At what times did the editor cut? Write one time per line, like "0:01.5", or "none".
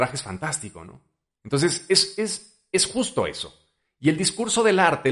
0:01.3

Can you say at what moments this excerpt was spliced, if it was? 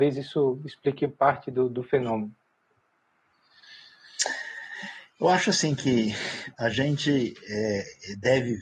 none

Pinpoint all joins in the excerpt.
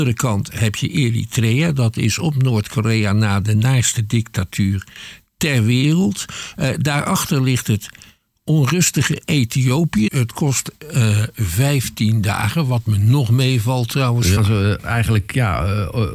0:10.1
0:14.4

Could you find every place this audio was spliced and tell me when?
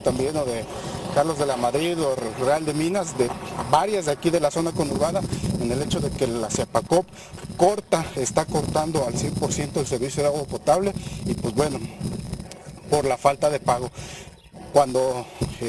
none

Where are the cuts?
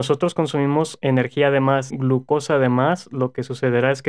0:01.9

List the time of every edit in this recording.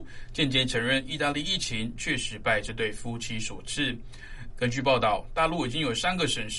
0:04.5

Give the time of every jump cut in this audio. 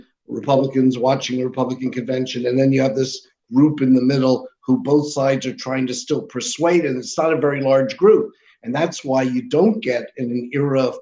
none

